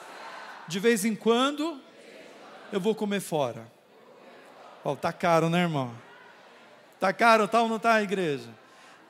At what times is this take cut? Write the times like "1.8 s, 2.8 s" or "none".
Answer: none